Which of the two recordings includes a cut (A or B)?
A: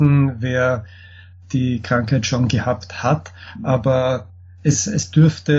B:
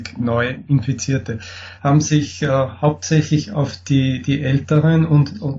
B